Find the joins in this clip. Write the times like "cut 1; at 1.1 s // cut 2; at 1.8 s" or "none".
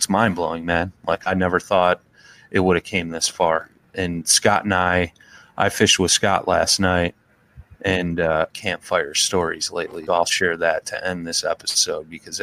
cut 1; at 3.9 s // cut 2; at 8.5 s // cut 3; at 10.1 s